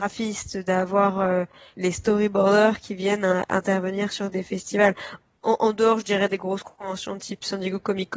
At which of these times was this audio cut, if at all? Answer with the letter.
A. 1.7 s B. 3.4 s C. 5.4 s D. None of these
A